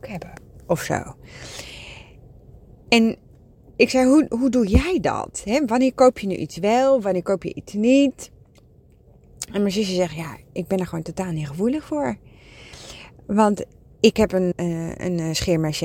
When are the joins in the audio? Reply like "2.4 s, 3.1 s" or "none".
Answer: 14.5 s